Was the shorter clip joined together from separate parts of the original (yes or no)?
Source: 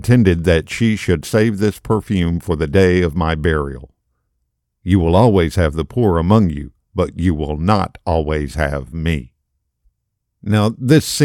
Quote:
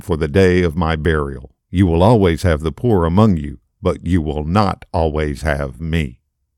yes